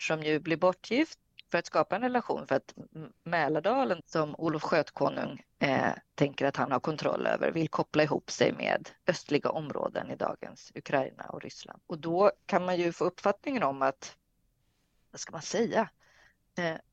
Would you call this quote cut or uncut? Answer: cut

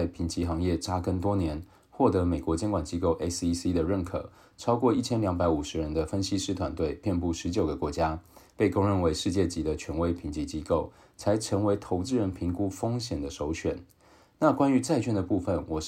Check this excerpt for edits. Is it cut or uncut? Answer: uncut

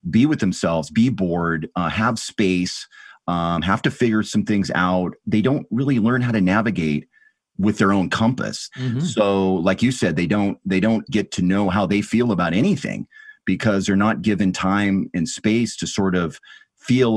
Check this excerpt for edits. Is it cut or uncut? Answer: cut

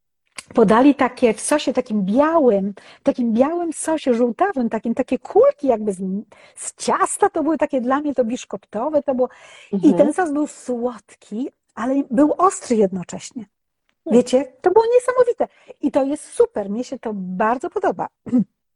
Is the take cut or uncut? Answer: uncut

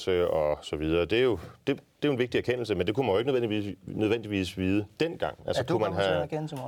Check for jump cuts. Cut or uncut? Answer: uncut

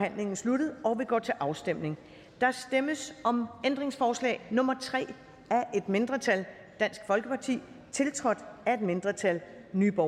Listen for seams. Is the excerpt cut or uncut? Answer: uncut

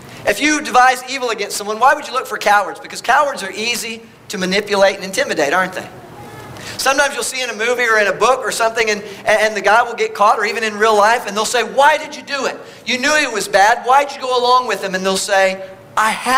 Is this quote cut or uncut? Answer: uncut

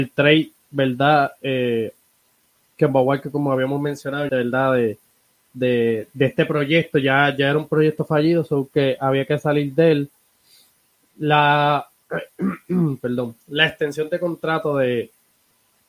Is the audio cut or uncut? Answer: cut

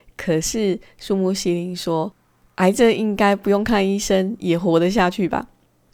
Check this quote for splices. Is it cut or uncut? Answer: uncut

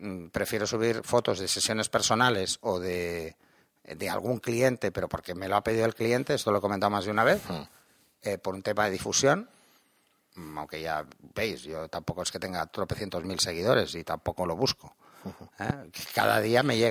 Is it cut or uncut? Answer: uncut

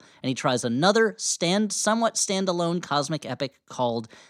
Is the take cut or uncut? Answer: uncut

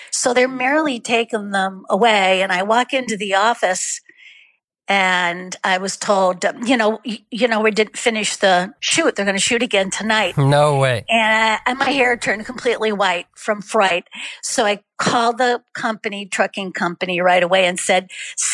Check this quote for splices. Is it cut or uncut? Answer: uncut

